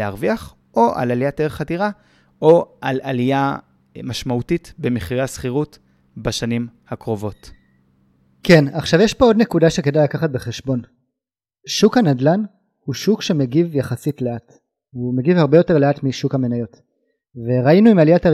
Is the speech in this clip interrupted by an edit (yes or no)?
no